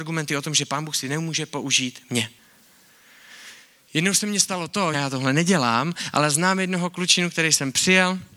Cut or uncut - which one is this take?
cut